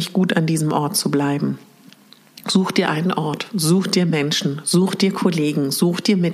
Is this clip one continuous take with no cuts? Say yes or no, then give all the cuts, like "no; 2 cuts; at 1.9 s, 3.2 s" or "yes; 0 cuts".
yes; 0 cuts